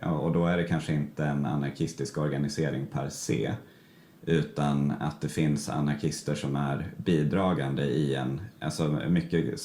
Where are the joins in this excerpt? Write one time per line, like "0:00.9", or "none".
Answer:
none